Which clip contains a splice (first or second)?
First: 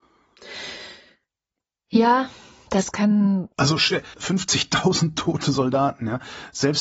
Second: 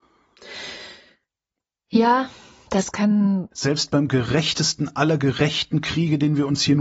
second